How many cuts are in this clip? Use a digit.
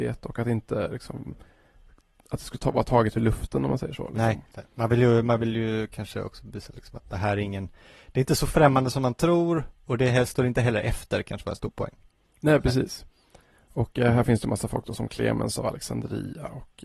1